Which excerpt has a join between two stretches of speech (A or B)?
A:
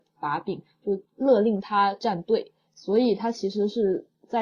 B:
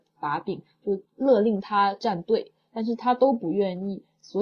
A